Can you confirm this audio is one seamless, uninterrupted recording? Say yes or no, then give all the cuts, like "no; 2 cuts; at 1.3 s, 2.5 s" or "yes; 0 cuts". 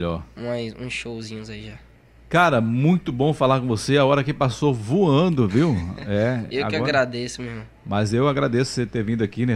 yes; 0 cuts